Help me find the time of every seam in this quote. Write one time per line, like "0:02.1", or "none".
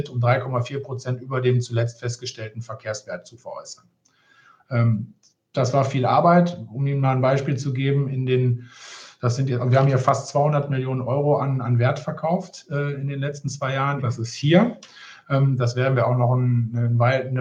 0:14.0
0:15.2